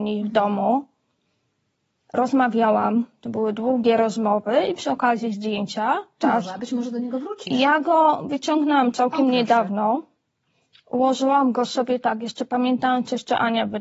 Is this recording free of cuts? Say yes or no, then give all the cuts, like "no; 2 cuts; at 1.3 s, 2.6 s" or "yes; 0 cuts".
no; 1 cut; at 6.2 s